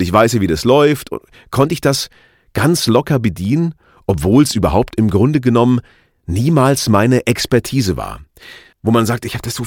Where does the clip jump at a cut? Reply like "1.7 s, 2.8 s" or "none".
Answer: 8.7 s